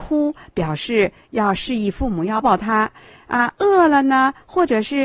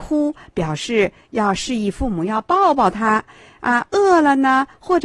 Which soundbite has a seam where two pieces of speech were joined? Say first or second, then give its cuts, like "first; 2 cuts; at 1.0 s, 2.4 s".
first; 1 cut; at 2.4 s